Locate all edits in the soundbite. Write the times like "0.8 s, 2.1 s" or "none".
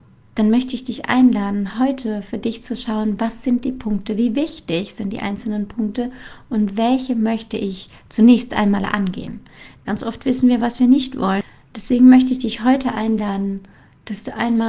9.9 s

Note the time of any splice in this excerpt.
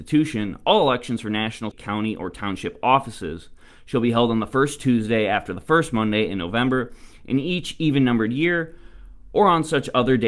1.7 s

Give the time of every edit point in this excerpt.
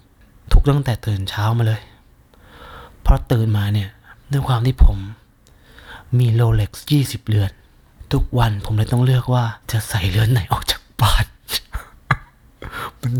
4.2 s, 9.6 s

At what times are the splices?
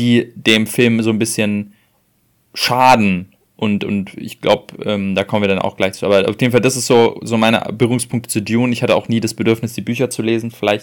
none

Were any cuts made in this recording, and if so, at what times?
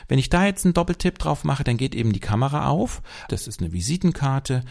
3.3 s

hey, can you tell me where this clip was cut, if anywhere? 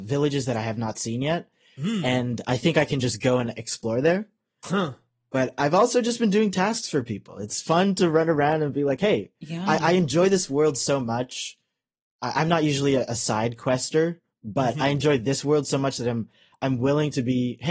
none

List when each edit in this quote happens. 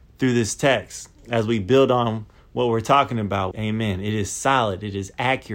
3.5 s

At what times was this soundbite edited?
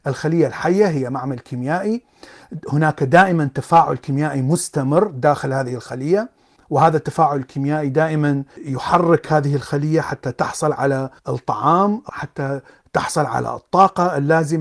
11.2 s

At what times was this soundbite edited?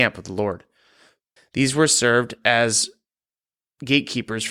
1.4 s

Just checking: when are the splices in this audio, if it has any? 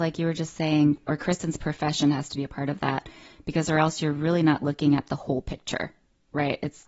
1.1 s

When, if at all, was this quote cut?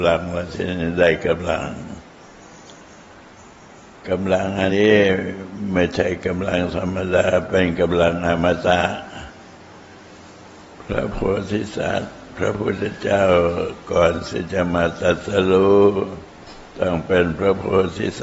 4.7 s

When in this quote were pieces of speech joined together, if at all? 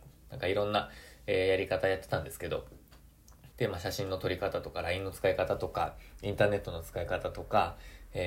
3.5 s

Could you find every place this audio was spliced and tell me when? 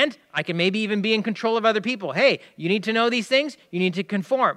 none

